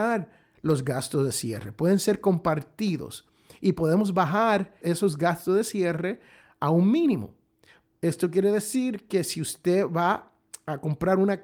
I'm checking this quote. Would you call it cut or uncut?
cut